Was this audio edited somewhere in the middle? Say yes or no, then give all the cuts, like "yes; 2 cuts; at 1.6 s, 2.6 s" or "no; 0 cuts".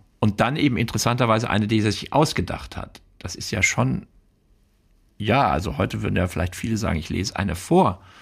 no; 0 cuts